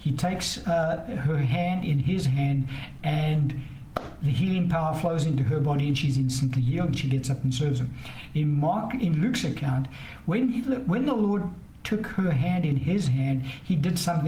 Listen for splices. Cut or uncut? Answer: uncut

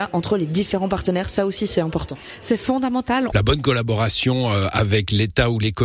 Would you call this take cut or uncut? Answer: cut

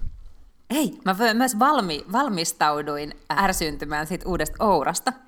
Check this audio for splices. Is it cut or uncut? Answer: cut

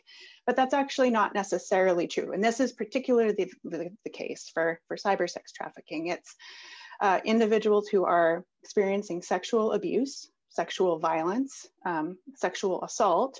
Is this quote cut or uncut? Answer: cut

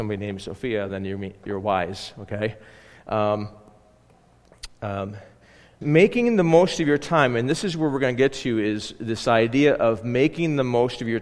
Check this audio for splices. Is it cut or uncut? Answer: cut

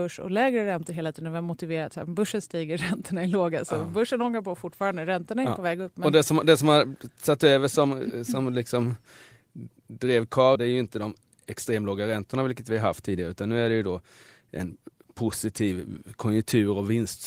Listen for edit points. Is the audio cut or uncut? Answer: cut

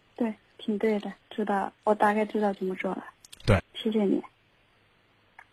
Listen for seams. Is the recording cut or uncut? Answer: cut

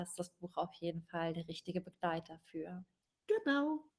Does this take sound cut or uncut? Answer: uncut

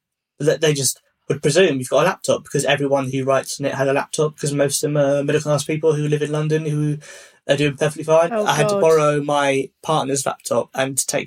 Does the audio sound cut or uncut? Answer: cut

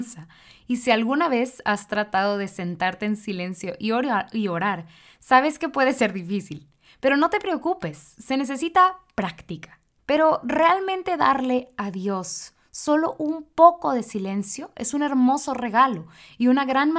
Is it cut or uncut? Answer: cut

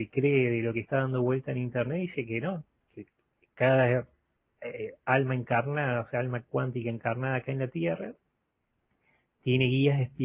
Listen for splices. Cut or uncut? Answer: uncut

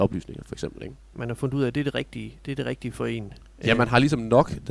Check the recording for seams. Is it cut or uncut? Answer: cut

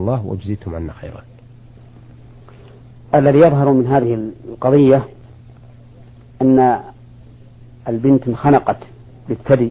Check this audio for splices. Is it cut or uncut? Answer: uncut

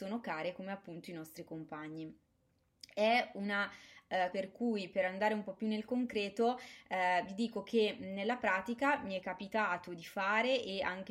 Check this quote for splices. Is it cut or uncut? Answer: cut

